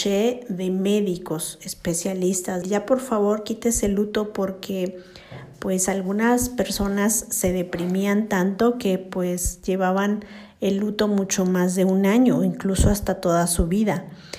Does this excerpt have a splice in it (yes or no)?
yes